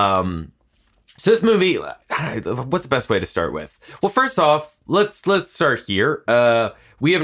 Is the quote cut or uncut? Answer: uncut